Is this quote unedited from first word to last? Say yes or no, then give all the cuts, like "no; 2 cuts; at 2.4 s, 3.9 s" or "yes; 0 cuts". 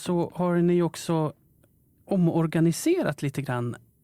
yes; 0 cuts